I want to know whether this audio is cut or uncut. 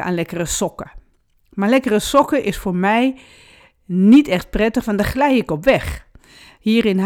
uncut